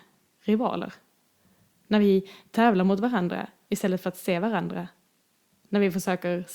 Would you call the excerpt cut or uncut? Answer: uncut